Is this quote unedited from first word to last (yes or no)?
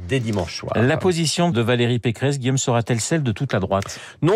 no